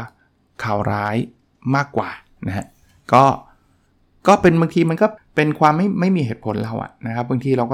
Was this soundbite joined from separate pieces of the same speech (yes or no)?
yes